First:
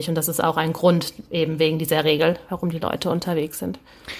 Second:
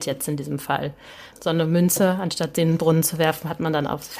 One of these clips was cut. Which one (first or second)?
second